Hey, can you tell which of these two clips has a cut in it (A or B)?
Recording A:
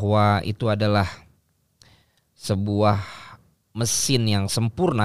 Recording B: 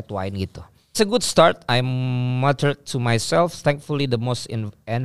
B